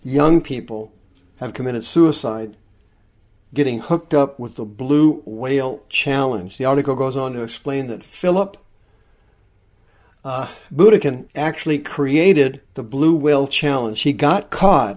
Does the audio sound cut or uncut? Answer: cut